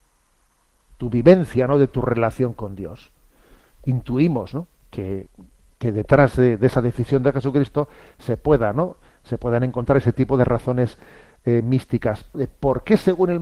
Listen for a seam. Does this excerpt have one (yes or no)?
yes